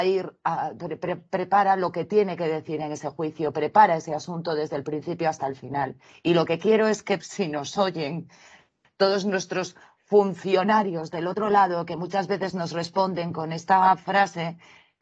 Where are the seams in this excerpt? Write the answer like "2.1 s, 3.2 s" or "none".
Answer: 6.1 s, 7.2 s